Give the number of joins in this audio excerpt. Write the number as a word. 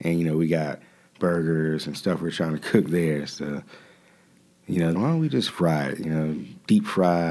one